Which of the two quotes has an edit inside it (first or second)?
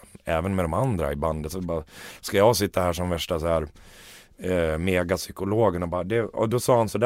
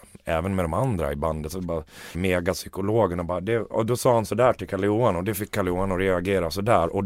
second